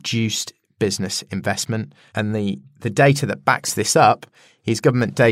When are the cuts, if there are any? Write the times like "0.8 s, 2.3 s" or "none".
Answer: 2.1 s